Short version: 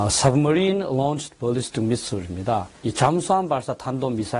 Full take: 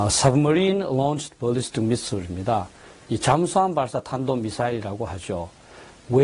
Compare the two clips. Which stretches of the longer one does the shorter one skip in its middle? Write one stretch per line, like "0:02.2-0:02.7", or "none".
0:02.8-0:03.0